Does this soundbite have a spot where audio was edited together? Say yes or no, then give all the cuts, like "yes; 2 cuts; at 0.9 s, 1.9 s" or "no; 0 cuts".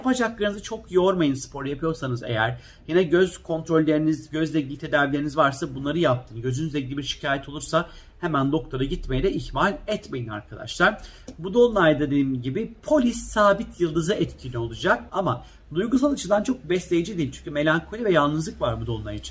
yes; 1 cut; at 15.1 s